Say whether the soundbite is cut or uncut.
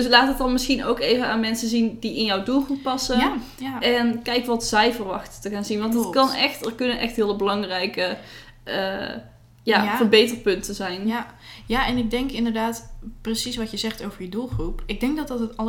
uncut